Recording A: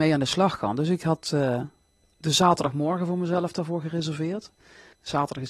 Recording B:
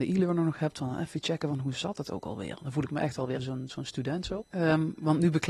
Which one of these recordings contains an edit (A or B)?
B